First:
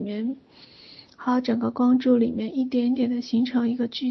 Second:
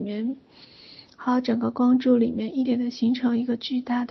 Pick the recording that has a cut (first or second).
second